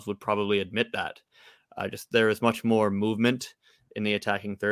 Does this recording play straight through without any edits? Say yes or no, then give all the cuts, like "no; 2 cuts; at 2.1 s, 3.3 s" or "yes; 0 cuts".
yes; 0 cuts